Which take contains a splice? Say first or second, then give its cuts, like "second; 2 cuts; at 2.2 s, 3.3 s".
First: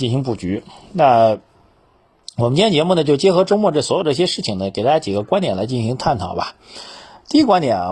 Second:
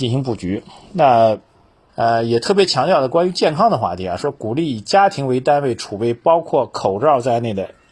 second; 1 cut; at 1.9 s